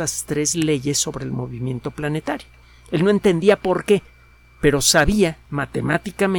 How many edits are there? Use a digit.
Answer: 1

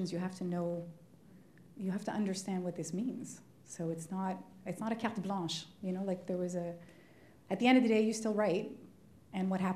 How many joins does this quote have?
0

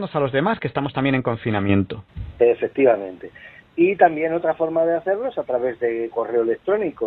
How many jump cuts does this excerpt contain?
0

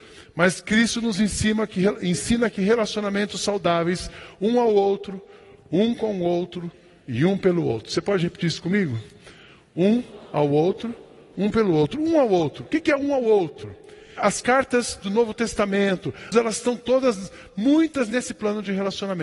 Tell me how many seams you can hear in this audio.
3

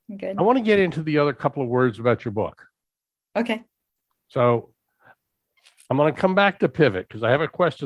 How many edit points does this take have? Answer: 0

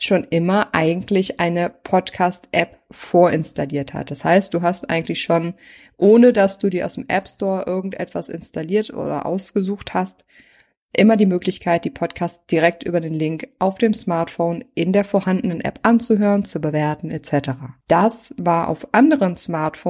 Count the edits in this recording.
2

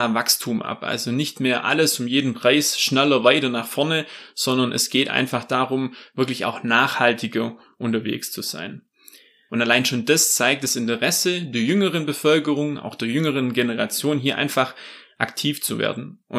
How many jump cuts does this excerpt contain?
1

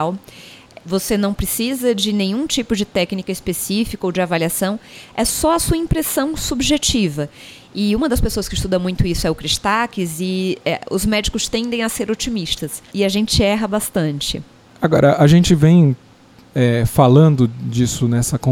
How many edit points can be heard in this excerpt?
1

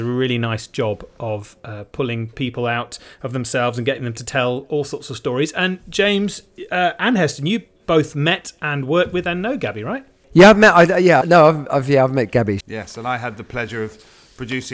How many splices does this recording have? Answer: 2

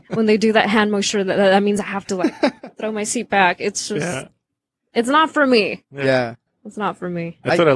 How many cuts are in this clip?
0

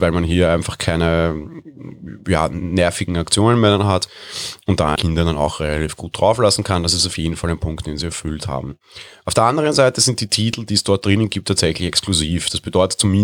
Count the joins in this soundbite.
1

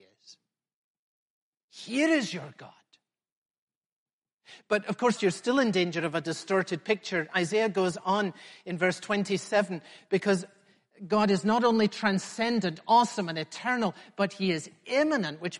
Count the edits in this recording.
1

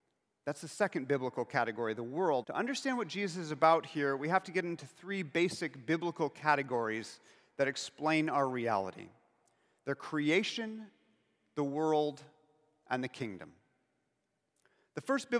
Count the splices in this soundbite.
1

